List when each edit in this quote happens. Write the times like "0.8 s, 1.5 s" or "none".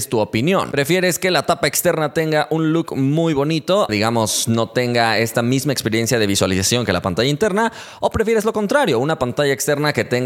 3.9 s